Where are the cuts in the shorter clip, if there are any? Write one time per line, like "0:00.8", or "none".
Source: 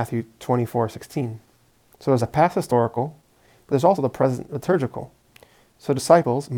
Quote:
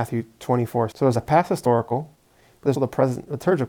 0:00.9
0:02.7